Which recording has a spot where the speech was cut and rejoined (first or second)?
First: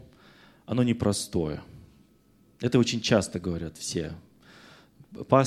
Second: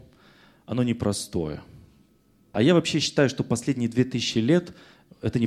second